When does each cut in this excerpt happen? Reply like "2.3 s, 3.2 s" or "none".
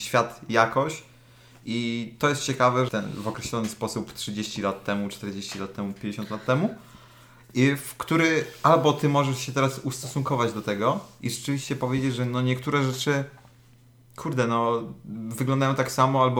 2.9 s